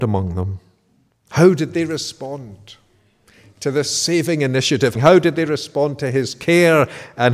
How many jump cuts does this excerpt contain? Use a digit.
2